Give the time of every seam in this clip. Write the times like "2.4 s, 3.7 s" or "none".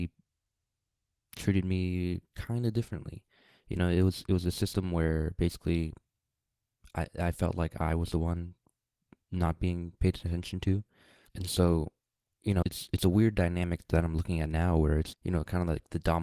11.3 s, 12.6 s, 15.1 s

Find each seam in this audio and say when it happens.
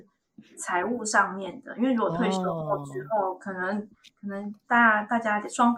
none

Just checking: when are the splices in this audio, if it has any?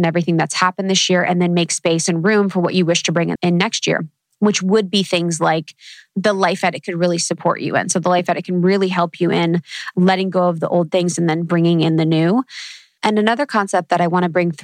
3.4 s

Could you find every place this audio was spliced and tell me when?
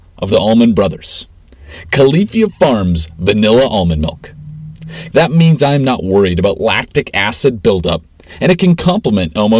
5.1 s

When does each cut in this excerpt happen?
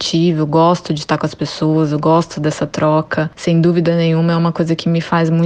none

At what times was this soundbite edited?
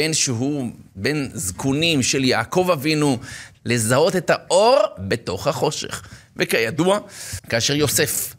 3.5 s, 7.4 s

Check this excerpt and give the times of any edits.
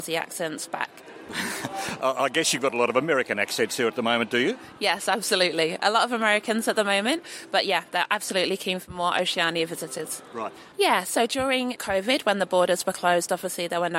10.7 s, 11.8 s

